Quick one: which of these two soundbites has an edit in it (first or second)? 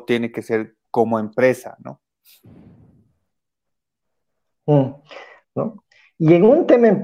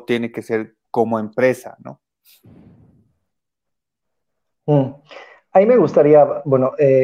first